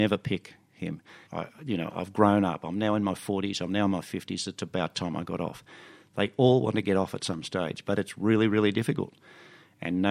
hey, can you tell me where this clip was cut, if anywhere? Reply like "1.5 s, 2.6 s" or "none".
1.3 s